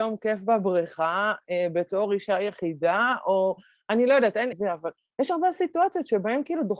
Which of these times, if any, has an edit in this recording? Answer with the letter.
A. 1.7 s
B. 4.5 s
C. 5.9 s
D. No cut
B